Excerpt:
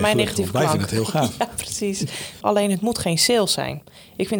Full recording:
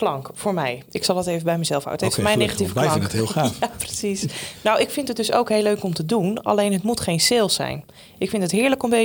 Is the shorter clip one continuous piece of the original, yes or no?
no